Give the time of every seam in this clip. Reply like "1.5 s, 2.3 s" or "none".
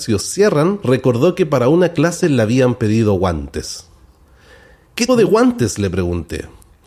5.1 s